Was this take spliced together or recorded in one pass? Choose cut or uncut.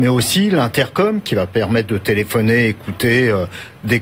uncut